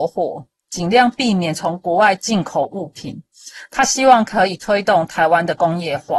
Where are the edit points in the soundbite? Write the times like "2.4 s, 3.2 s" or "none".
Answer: none